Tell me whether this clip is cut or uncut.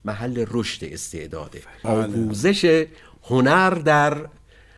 cut